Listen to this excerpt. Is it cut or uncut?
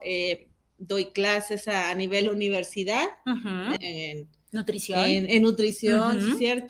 cut